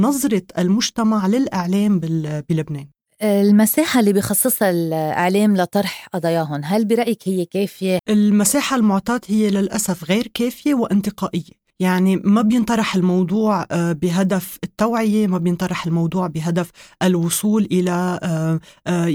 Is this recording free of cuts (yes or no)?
no